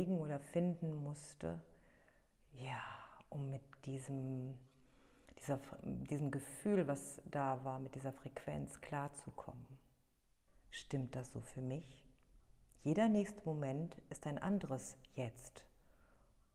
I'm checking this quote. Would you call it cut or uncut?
cut